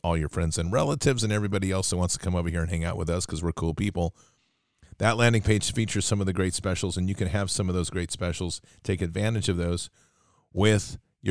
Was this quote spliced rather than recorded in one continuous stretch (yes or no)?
no